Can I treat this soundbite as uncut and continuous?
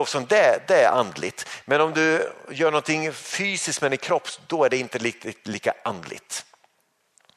yes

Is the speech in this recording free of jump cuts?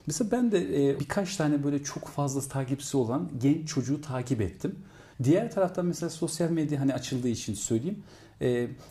no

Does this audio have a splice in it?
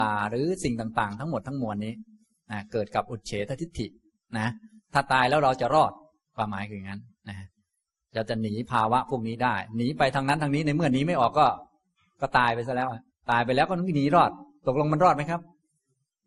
no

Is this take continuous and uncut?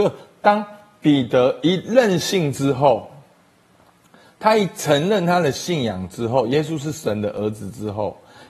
yes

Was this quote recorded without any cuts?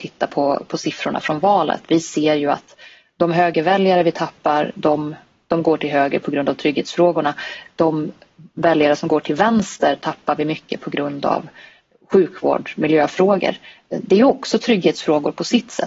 yes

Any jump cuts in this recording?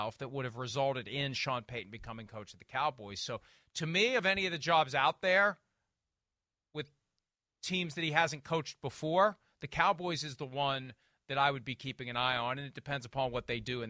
no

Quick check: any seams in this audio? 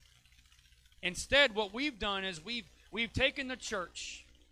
yes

